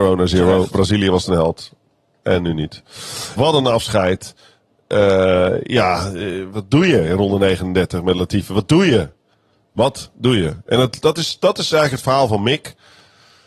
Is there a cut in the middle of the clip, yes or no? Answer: yes